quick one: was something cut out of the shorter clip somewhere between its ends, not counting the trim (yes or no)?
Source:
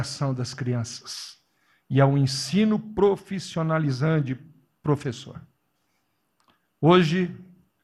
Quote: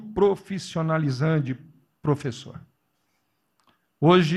no